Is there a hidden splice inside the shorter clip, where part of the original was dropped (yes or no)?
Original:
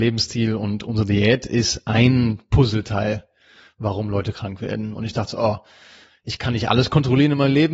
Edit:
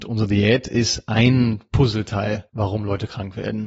yes